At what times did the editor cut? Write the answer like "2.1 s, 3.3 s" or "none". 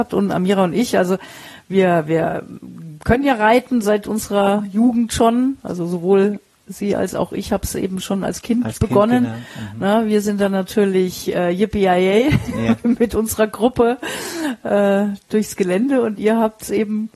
none